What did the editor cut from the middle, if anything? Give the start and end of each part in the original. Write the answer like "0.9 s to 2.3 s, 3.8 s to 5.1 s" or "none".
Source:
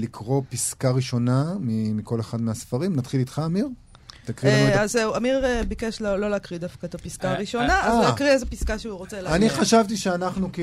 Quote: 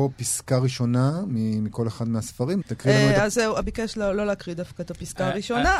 2.9 s to 4.2 s, 5.2 s to 5.7 s